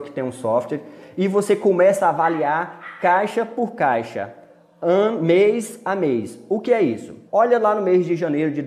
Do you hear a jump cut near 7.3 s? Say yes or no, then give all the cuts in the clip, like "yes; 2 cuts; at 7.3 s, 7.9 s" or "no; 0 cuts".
yes; 1 cut; at 7.3 s